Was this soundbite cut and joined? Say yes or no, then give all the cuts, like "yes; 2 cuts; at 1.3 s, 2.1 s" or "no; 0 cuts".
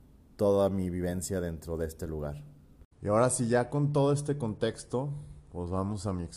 yes; 1 cut; at 2.9 s